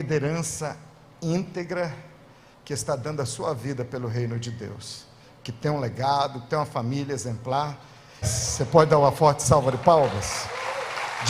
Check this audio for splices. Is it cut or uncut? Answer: cut